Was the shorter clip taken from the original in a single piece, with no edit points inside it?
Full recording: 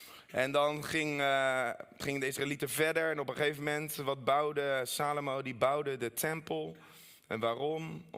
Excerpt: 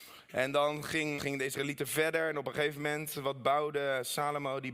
no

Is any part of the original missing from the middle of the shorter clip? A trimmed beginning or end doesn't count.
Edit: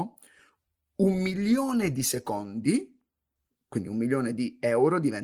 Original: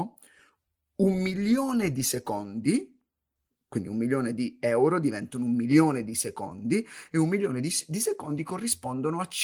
no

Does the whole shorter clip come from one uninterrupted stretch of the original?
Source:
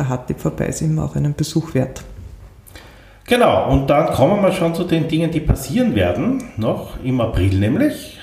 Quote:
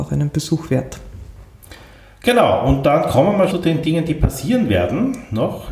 no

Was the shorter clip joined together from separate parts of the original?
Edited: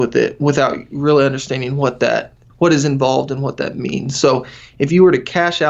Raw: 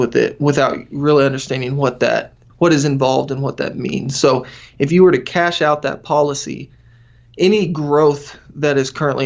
no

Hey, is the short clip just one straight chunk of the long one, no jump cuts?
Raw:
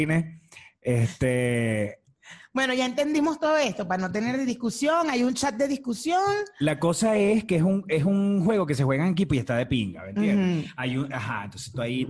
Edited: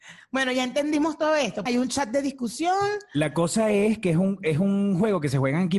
no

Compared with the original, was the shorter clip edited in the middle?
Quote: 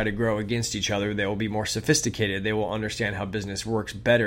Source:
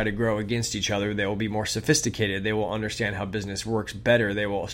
no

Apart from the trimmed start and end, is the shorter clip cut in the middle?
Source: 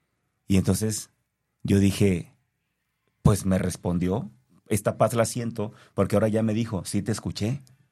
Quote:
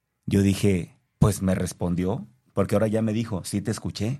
yes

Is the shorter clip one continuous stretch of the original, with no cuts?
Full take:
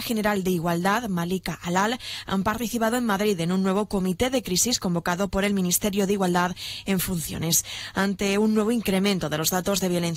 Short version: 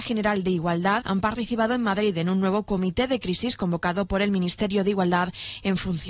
no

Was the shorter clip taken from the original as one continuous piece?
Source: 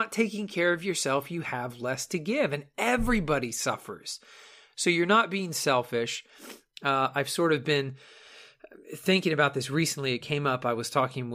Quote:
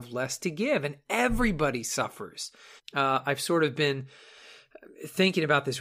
no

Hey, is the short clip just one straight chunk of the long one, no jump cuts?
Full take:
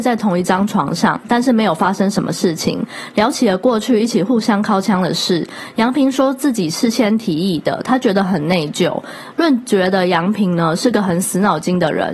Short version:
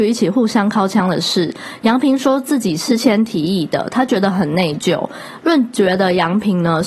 yes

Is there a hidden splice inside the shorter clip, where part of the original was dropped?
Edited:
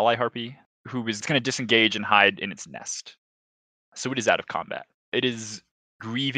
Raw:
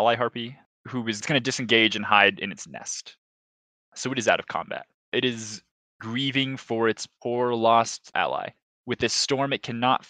no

